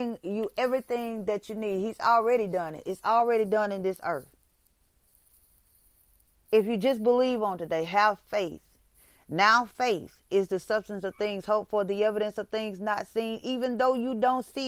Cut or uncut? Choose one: uncut